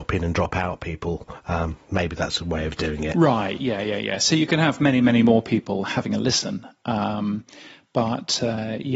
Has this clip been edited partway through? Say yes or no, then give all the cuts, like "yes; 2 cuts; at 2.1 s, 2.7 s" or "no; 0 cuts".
no; 0 cuts